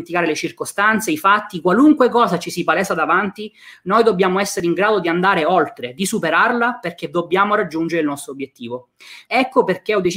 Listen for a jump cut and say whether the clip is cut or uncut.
cut